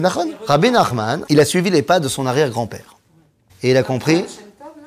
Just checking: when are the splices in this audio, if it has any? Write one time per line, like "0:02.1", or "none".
0:01.3
0:03.5